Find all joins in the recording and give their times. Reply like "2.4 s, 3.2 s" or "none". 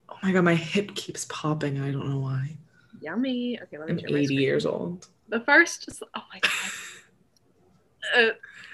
none